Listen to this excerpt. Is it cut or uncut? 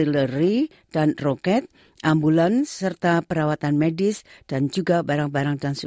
uncut